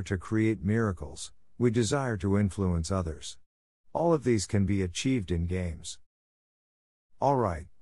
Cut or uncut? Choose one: uncut